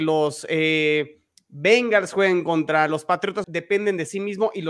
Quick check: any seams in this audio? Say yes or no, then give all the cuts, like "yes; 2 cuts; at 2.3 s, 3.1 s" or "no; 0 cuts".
yes; 1 cut; at 3.4 s